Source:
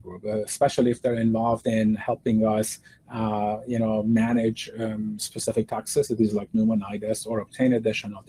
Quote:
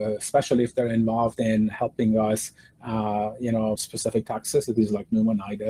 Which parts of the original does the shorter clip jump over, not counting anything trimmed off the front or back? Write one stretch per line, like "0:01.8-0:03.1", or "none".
0:04.0-0:05.2